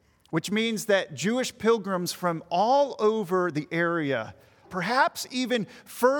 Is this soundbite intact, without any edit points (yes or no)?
no